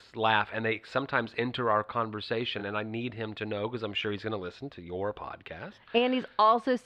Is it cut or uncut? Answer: uncut